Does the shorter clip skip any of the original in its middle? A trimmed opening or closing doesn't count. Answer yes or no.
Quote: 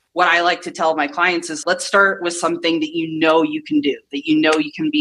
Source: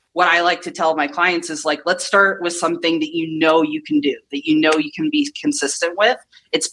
yes